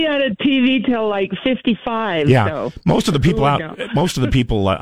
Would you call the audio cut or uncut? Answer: uncut